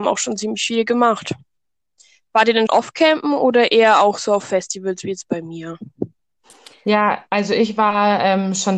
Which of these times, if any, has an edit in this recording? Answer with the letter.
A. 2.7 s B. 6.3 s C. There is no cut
A